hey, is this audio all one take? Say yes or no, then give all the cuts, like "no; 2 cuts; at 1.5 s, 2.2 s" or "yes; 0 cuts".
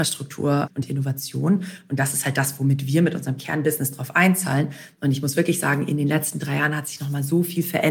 no; 1 cut; at 5.0 s